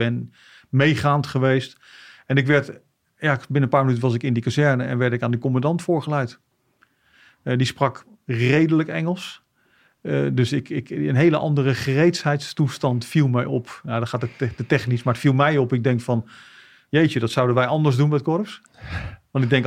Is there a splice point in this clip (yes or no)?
yes